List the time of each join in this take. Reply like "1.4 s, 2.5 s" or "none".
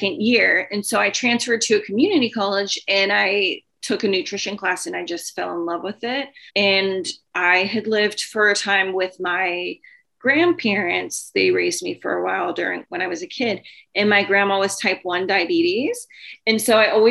6.5 s